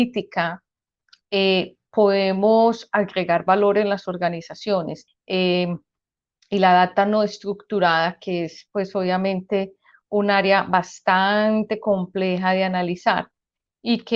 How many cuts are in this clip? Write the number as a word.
one